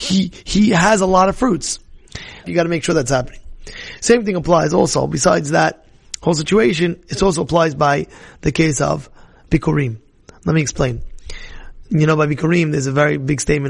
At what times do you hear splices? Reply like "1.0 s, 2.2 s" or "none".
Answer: 2.4 s